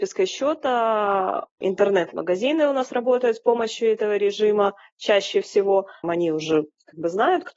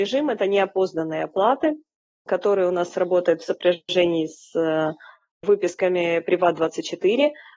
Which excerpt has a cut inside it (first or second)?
first